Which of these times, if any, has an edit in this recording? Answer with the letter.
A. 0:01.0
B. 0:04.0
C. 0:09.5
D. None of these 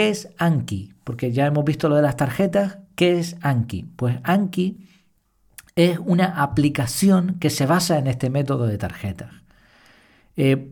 D